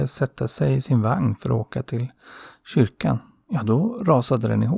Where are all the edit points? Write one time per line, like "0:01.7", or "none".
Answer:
none